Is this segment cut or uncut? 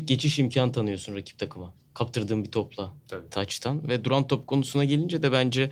uncut